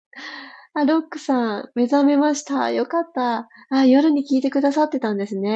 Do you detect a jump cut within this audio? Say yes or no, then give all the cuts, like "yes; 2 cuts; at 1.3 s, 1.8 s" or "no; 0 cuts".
no; 0 cuts